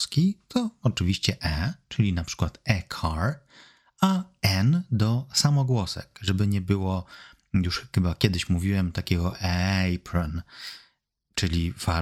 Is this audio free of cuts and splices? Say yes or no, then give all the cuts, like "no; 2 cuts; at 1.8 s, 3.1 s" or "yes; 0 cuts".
yes; 0 cuts